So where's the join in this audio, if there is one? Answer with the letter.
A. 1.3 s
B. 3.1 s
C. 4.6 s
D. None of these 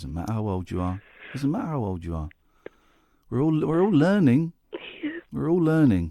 C